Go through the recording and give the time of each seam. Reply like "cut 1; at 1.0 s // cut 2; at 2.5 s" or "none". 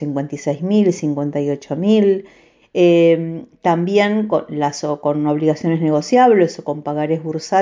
cut 1; at 2.6 s